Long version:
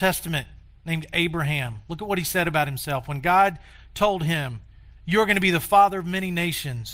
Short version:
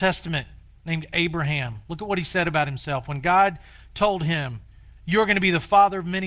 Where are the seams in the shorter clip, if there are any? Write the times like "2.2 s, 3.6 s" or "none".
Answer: none